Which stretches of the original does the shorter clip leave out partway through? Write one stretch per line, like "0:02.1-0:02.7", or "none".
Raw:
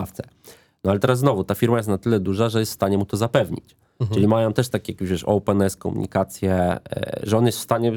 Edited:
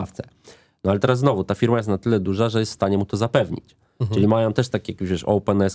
none